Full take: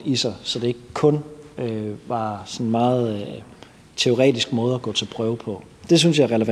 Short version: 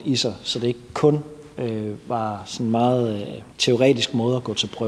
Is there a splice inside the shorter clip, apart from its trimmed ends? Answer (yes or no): yes